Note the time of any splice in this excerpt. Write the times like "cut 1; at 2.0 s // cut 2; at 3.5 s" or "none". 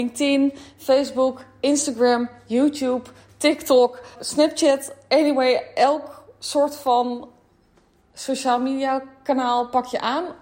cut 1; at 4.1 s